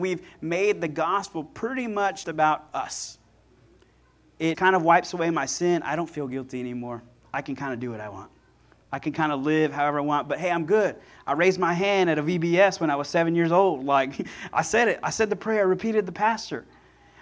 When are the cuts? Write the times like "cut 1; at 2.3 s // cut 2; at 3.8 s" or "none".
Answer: cut 1; at 2.2 s // cut 2; at 4.5 s